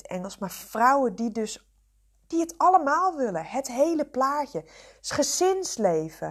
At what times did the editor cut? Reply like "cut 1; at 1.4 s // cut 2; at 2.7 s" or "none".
none